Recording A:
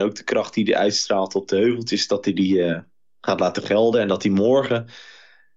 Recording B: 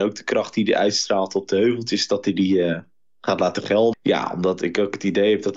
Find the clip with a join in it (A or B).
B